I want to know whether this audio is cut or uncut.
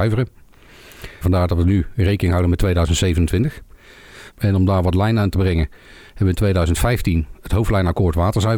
cut